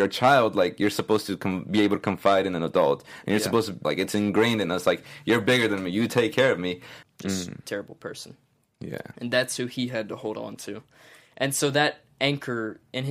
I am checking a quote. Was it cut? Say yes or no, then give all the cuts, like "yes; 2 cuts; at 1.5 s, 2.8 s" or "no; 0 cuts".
yes; 2 cuts; at 3.8 s, 7.0 s